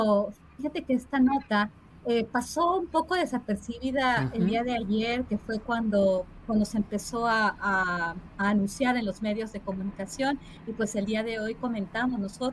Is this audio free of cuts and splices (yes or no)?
yes